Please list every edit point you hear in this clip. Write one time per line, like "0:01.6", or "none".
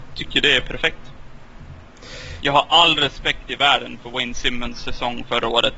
0:02.4